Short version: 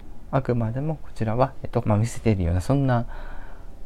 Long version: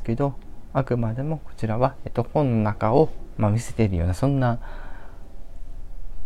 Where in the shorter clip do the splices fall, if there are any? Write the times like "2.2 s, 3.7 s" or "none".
1.8 s